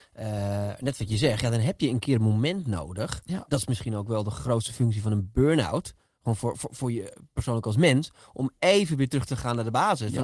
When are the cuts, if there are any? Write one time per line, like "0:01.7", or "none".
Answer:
none